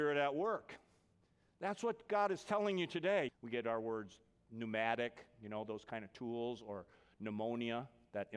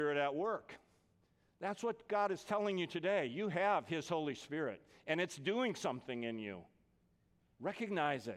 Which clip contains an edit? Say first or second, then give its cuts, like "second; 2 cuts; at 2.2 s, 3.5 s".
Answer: first; 1 cut; at 3.3 s